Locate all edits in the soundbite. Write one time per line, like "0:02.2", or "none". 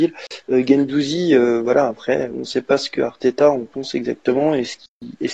0:02.3